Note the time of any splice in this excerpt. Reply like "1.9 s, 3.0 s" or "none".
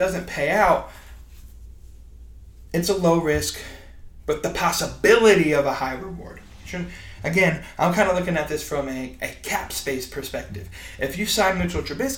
none